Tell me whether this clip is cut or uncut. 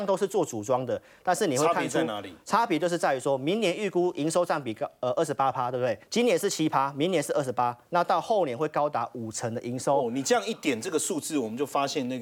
cut